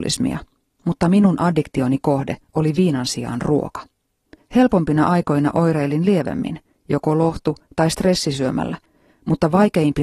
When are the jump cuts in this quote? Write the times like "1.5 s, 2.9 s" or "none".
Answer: 4.4 s